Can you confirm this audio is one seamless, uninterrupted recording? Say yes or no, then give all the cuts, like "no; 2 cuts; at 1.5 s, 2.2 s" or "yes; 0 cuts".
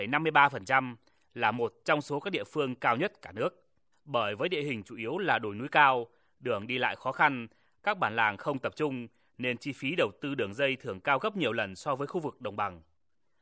no; 1 cut; at 3.9 s